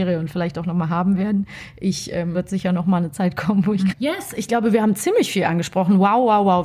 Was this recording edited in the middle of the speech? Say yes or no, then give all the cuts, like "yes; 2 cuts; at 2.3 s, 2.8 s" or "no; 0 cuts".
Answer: yes; 2 cuts; at 2.3 s, 3.9 s